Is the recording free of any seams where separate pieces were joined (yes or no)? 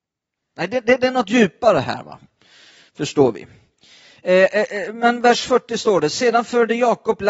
yes